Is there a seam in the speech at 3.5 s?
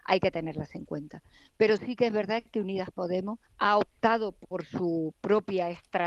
yes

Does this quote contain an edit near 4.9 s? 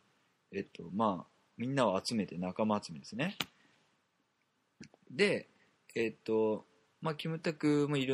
yes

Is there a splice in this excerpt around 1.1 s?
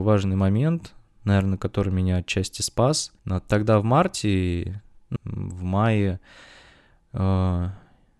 no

